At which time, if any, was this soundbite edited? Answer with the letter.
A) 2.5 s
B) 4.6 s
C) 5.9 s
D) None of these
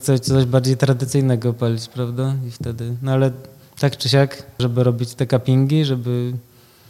B